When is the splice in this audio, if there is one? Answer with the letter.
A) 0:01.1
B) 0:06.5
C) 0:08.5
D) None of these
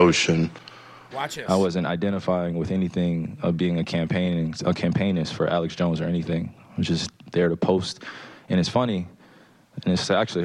A